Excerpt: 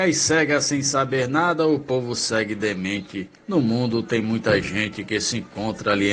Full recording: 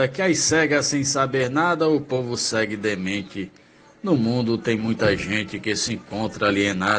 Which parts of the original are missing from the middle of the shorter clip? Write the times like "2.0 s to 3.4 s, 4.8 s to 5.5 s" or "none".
3.6 s to 3.9 s